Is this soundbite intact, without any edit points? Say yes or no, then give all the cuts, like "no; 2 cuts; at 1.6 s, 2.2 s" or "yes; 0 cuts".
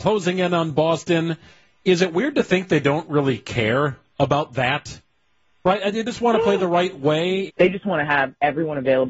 no; 1 cut; at 7.5 s